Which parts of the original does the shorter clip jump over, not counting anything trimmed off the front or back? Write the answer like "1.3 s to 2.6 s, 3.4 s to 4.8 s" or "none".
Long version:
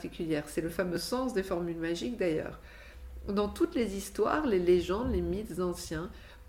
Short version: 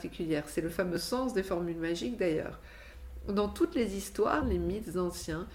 4.4 s to 5.0 s